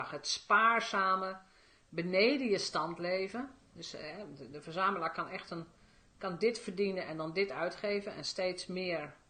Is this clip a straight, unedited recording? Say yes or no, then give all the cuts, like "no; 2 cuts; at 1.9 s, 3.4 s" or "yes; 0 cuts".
yes; 0 cuts